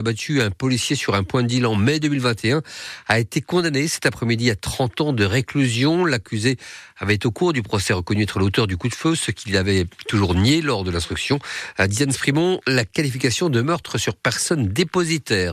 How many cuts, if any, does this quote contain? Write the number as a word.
zero